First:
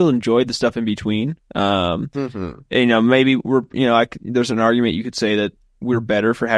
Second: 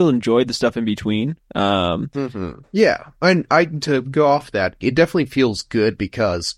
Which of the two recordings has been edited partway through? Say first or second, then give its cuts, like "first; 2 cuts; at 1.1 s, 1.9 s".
second; 2 cuts; at 2.6 s, 4.8 s